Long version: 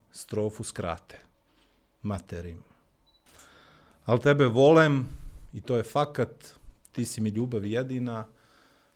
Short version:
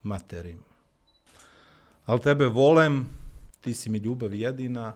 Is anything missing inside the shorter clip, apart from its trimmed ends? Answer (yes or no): yes